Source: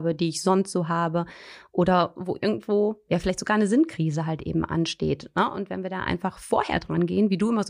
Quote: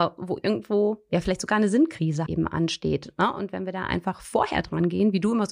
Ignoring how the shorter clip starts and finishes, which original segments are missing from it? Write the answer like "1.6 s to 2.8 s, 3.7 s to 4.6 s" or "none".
4.2 s to 4.4 s